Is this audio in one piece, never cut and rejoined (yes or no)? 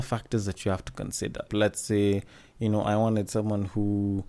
no